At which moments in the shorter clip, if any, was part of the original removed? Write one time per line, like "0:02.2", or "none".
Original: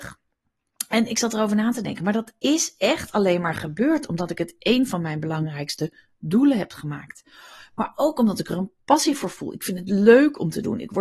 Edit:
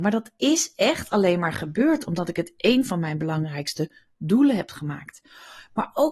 none

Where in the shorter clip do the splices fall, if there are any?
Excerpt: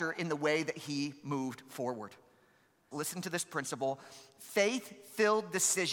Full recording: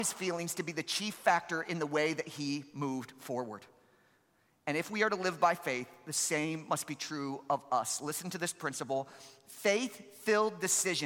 0:02.9

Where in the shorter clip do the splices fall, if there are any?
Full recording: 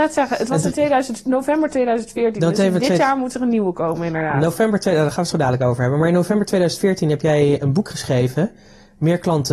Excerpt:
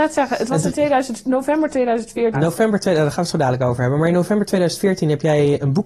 0:02.3

